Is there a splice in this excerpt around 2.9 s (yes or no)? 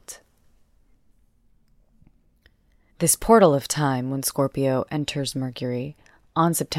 yes